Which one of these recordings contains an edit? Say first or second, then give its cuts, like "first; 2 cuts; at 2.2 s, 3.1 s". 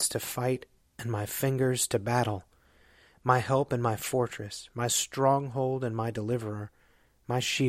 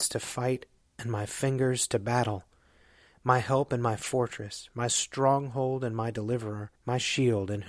second; 1 cut; at 6.8 s